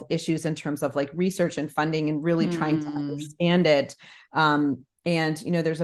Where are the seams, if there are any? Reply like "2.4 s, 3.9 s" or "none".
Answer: none